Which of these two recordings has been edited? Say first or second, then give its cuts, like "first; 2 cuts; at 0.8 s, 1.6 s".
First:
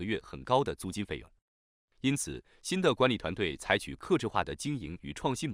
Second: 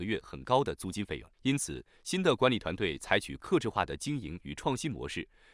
second; 1 cut; at 1.3 s